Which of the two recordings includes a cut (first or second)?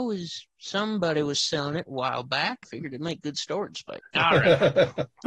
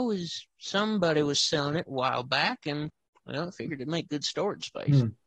first